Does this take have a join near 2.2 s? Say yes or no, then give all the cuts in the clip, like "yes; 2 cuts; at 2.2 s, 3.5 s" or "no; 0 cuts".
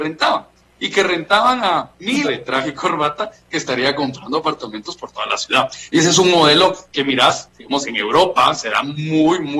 yes; 1 cut; at 2.2 s